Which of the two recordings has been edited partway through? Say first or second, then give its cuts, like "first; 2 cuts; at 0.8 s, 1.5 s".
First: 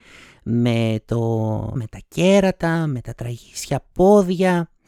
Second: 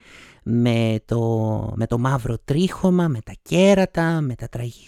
first; 1 cut; at 1.8 s